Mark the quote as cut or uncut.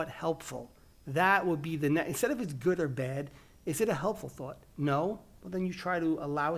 uncut